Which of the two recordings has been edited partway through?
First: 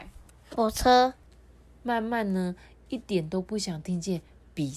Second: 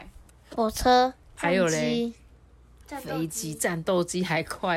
first; 1 cut; at 1.3 s

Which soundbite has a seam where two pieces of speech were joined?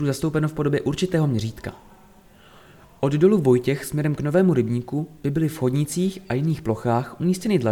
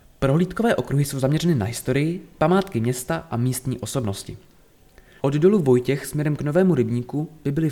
second; 1 cut; at 5.2 s

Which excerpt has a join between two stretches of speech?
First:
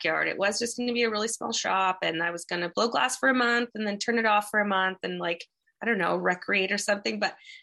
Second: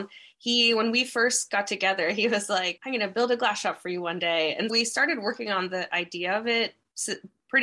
second; 2 cuts; at 2.8 s, 4.7 s

